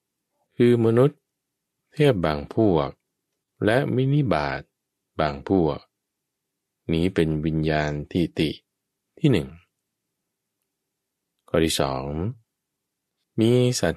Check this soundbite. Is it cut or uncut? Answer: uncut